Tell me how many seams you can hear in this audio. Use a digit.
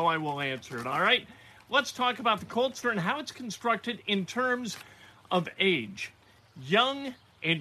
1